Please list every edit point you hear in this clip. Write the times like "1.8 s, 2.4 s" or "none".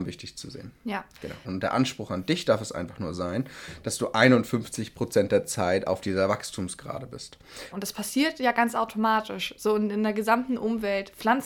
1.4 s, 7.7 s

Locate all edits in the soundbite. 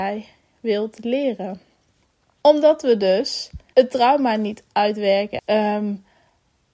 2.4 s, 3.7 s, 5.4 s

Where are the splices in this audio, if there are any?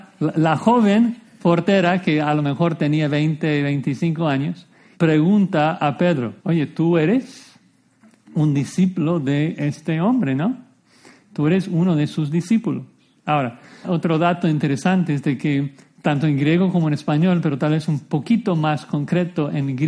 4.9 s, 6.4 s, 13.8 s

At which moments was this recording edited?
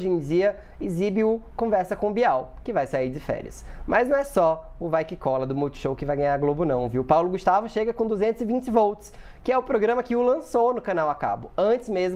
none

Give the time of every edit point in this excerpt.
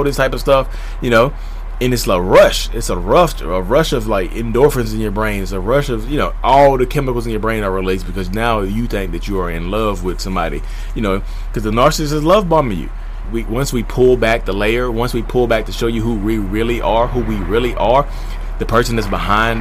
13.2 s

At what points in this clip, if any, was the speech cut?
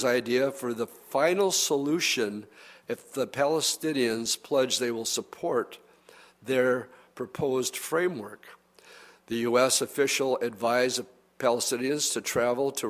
none

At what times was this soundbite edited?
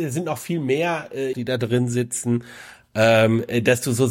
1.3 s

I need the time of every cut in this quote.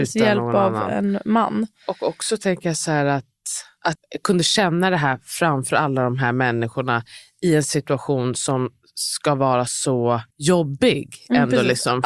4.0 s, 10.3 s

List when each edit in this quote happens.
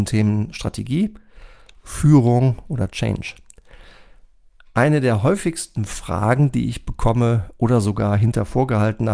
none

